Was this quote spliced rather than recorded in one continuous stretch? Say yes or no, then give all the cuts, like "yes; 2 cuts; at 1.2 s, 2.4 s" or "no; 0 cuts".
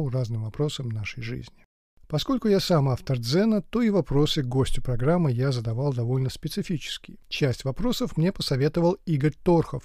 no; 0 cuts